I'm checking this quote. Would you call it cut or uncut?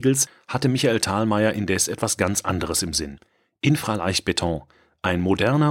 uncut